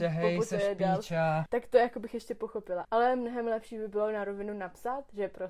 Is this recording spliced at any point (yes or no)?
yes